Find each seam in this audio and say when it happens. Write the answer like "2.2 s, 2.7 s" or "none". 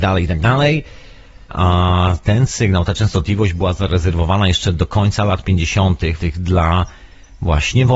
1.5 s, 6.2 s